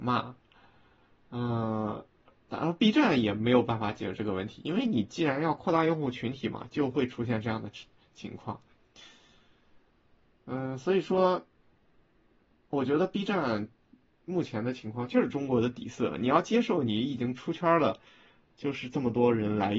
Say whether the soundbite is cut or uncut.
uncut